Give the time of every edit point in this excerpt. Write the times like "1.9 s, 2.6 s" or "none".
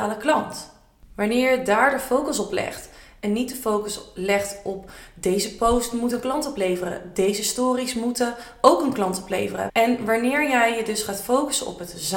9.7 s